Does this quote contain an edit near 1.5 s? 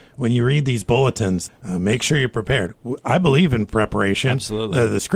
yes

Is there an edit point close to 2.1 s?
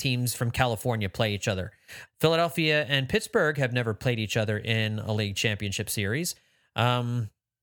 yes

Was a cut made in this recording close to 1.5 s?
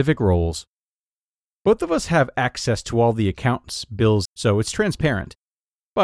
no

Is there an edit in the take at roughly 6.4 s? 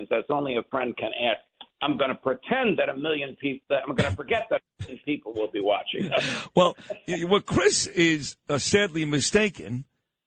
no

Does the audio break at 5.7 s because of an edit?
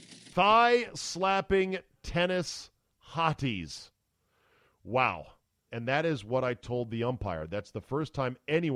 yes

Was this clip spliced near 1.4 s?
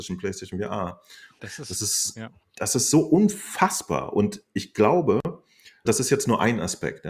yes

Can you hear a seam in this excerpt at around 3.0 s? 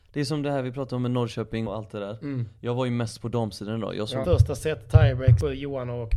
no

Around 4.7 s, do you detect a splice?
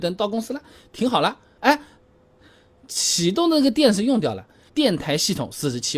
yes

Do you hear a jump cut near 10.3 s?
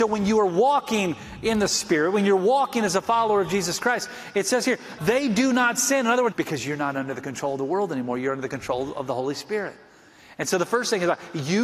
no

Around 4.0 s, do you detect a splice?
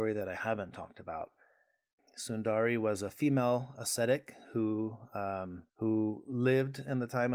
no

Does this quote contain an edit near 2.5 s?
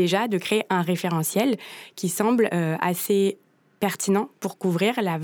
no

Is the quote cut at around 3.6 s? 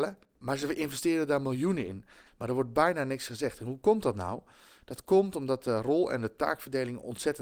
no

